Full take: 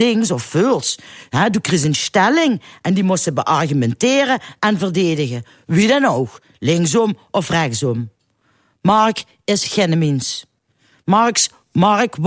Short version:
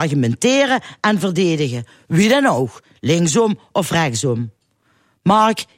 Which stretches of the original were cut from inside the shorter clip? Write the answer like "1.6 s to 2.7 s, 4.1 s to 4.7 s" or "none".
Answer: none